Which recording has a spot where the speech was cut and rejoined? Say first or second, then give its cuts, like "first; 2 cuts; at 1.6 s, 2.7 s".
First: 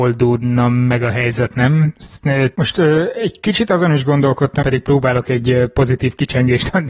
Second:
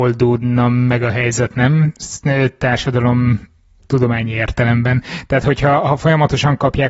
first; 2 cuts; at 2.5 s, 4.6 s